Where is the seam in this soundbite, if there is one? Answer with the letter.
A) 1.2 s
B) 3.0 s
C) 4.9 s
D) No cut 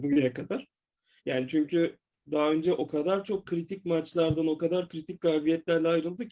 A